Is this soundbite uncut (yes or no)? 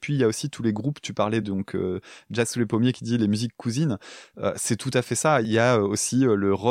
yes